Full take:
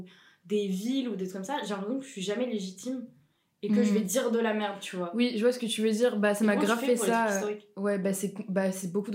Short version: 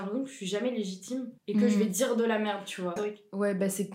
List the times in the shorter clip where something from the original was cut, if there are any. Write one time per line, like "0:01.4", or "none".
0:01.4
0:03.0